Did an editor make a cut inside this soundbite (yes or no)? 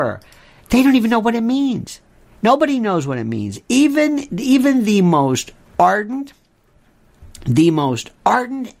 no